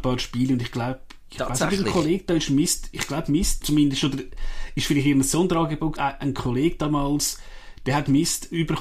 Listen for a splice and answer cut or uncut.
cut